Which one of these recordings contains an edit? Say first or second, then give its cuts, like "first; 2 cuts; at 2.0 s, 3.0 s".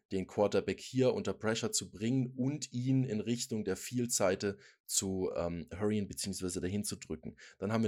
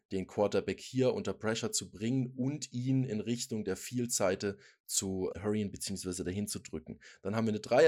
second; 1 cut; at 5.3 s